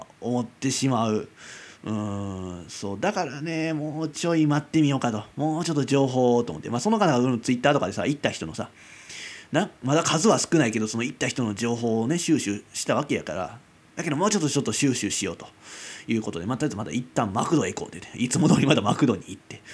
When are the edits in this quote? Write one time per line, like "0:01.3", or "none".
none